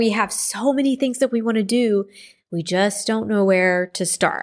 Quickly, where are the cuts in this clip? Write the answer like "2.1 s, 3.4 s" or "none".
none